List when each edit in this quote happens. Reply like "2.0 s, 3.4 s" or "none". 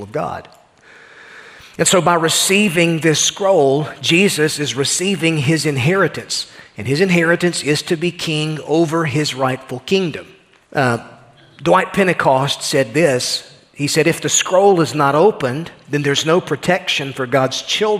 10.7 s